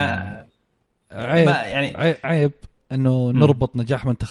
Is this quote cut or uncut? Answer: cut